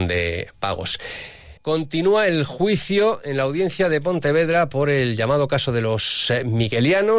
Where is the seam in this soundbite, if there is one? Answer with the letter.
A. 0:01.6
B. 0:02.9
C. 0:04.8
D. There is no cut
A